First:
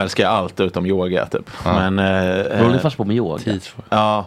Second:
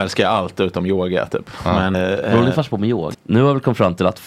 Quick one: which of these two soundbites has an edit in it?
second; 2 cuts; at 1.9 s, 3.1 s

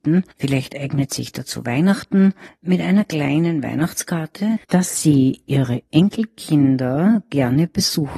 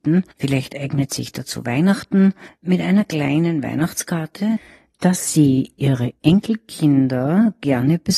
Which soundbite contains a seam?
first; 1 cut; at 4.6 s

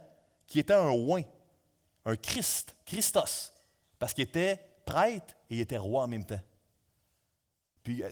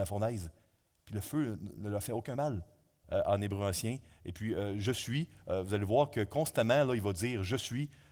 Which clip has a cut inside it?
second; 1 cut; at 3.0 s

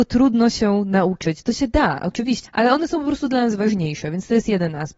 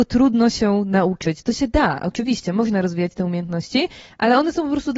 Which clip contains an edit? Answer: first; 1 cut; at 2.4 s

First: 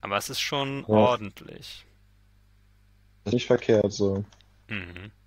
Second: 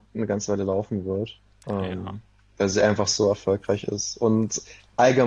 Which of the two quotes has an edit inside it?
first; 1 cut; at 3.3 s

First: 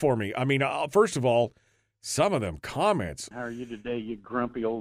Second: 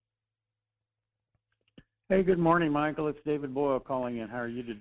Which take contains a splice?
first; 1 cut; at 3.3 s

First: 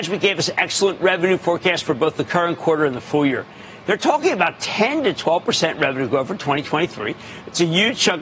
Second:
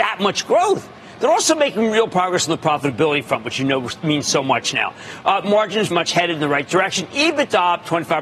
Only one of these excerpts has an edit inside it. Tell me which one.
second; 1 cut; at 5.9 s

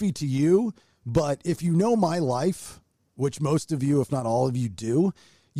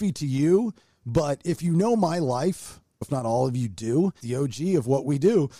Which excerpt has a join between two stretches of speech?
second; 2 cuts; at 3.0 s, 4.2 s

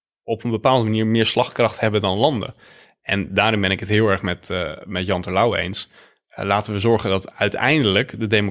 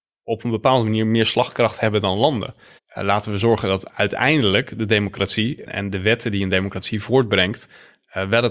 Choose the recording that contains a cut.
second; 2 cuts; at 2.8 s, 5.7 s

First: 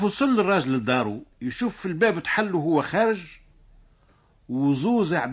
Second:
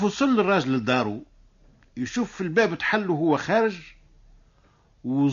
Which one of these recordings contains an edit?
first; 1 cut; at 1.3 s

